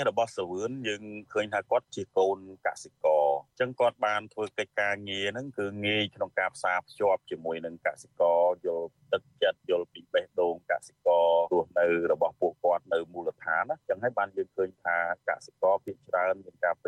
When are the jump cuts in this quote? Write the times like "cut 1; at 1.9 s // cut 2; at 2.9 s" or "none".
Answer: cut 1; at 9.6 s // cut 2; at 11.5 s